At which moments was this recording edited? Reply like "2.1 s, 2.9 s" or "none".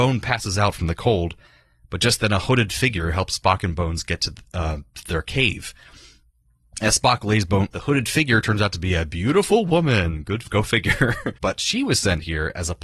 7.7 s, 11.3 s